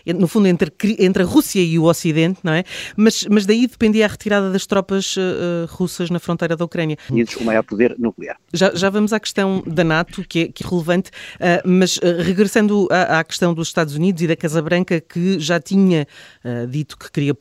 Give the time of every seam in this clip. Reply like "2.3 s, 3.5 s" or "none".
7.1 s, 10.6 s